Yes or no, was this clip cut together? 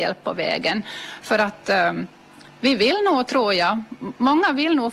no